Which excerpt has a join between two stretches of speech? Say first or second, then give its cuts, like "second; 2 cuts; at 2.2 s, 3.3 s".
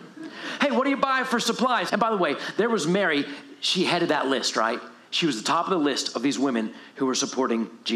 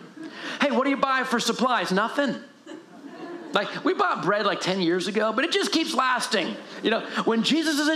first; 1 cut; at 1.9 s